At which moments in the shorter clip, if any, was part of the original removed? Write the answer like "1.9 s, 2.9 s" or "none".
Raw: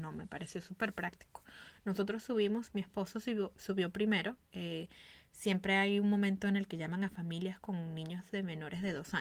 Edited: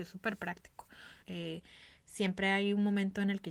1.2 s